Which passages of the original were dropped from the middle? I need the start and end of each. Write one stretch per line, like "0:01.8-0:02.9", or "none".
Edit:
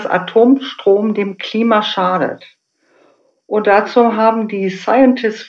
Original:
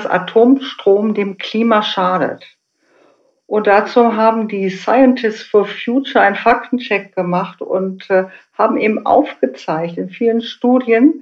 none